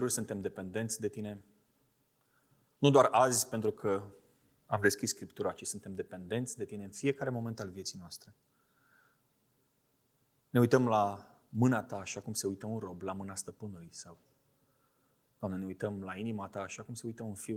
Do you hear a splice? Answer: no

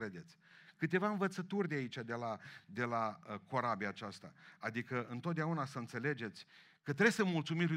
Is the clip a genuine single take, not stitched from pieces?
yes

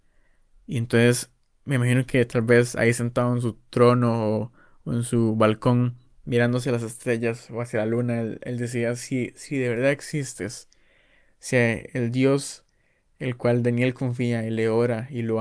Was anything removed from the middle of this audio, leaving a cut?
no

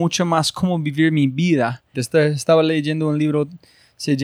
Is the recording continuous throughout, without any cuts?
no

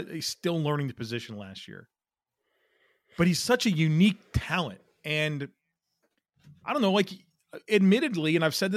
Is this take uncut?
yes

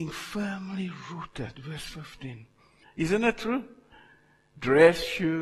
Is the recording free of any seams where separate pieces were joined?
no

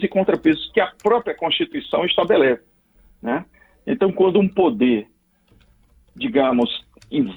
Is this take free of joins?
yes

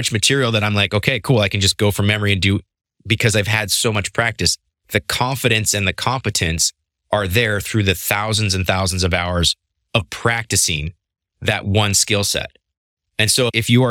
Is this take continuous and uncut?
yes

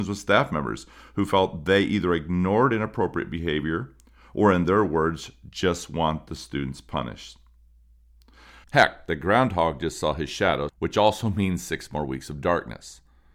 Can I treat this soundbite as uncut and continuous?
no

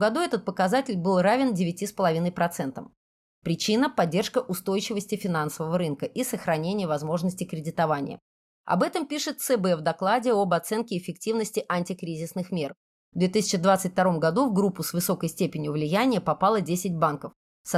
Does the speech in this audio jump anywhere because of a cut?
yes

